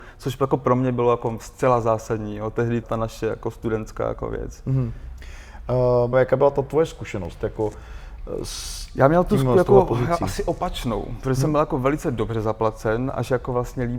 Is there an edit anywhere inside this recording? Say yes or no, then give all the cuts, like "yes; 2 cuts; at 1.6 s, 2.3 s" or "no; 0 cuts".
yes; 2 cuts; at 2.8 s, 6.1 s